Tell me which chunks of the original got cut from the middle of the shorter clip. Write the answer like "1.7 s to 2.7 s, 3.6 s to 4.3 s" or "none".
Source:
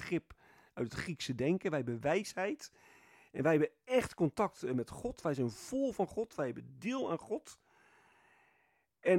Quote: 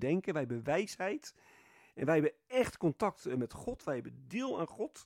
5.1 s to 6.3 s

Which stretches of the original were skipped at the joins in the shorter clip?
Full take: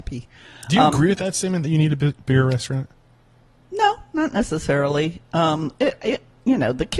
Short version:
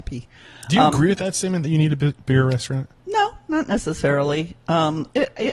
3.0 s to 3.6 s

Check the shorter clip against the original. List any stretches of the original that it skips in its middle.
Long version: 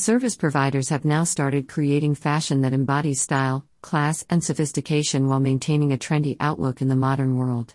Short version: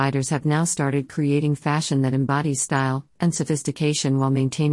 3.7 s to 4.2 s

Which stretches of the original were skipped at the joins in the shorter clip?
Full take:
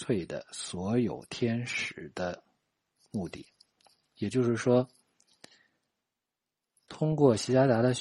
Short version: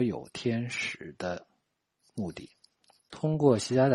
4.0 s to 6.8 s

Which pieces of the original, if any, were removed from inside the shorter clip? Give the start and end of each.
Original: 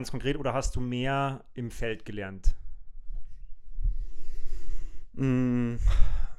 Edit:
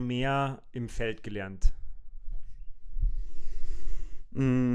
none

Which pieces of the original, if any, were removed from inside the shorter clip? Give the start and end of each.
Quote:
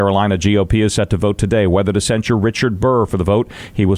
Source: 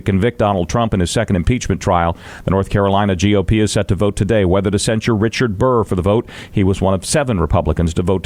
none

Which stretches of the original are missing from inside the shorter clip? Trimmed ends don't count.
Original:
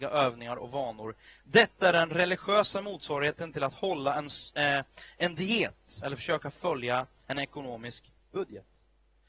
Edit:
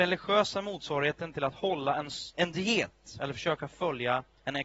4.5 s to 5.1 s

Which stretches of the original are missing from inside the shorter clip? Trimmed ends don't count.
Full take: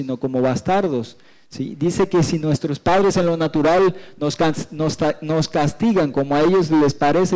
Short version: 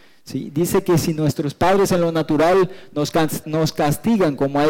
4.7 s to 5.2 s

